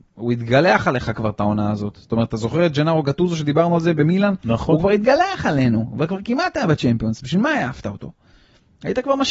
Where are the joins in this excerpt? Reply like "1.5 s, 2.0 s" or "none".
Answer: none